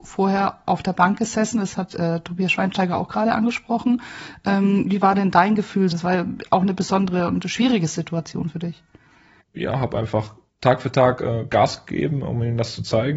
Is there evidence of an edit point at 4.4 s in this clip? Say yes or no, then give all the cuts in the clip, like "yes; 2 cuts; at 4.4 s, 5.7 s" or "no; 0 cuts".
no; 2 cuts; at 5.9 s, 9.4 s